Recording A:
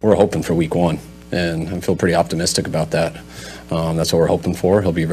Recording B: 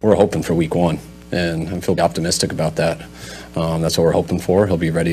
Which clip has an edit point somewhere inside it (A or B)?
B